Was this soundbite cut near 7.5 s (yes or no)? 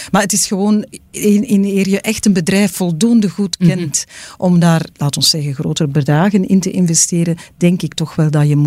no